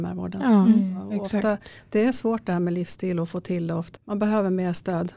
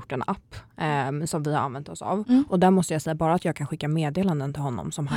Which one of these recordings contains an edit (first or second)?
first